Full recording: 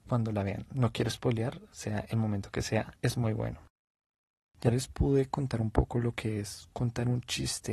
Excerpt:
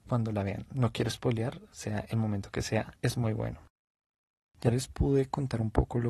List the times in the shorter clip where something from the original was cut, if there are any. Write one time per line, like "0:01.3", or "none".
none